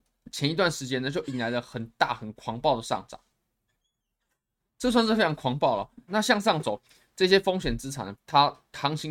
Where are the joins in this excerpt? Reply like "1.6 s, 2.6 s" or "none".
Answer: 6.1 s, 8.1 s

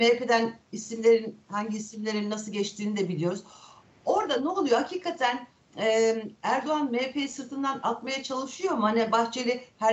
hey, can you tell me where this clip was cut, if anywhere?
none

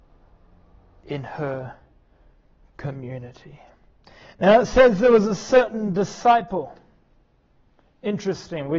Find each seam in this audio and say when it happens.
none

